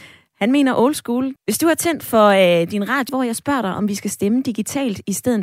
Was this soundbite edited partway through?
yes; 2 cuts; at 1.4 s, 3.1 s

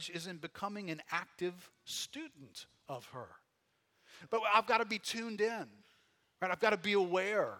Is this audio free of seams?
no; 1 cut; at 4.3 s

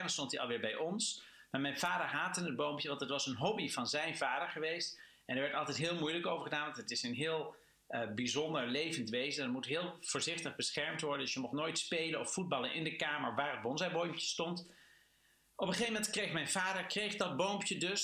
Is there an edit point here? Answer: no; 0 cuts

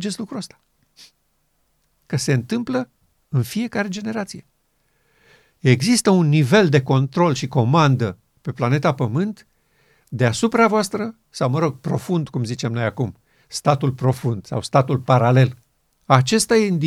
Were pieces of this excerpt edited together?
yes; 1 cut; at 15.9 s

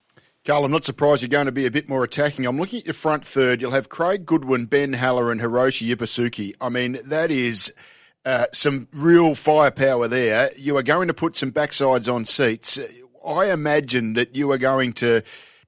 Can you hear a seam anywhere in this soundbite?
no; 0 cuts

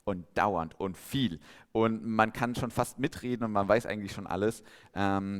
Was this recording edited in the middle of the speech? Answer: no; 0 cuts

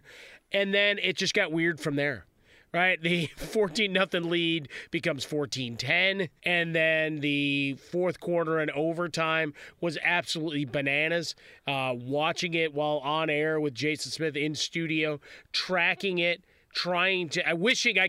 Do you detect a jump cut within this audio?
yes; 1 cut; at 6.4 s

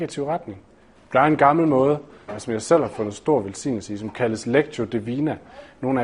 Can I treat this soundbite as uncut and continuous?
no; 2 cuts; at 1.0 s, 2.3 s

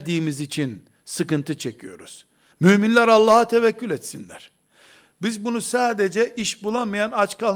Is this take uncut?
no; 1 cut; at 2.5 s

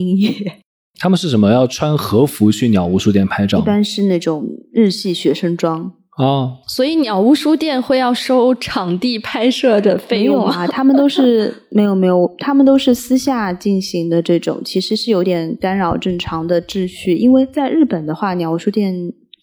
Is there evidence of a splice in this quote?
no; 0 cuts

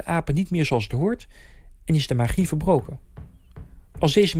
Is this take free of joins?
yes; 0 cuts

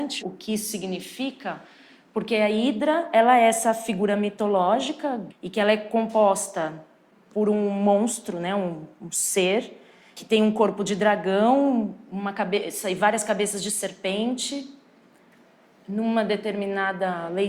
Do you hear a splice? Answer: no; 0 cuts

